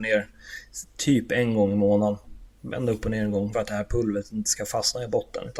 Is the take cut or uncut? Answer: cut